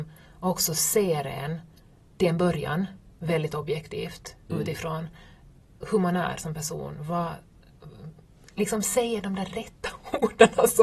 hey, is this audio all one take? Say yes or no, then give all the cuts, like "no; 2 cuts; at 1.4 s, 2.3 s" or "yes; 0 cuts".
yes; 0 cuts